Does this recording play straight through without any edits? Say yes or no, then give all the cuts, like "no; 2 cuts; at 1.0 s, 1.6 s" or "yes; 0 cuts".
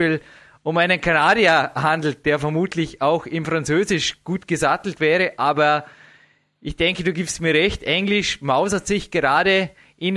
yes; 0 cuts